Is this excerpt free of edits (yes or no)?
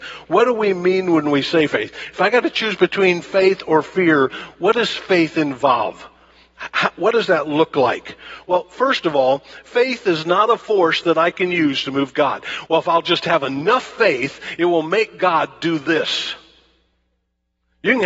yes